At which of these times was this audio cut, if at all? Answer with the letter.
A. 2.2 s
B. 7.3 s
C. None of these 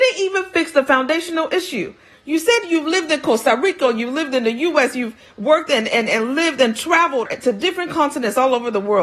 B